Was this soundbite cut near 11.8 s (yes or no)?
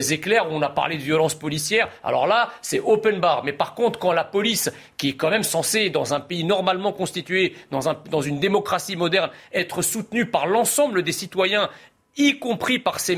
no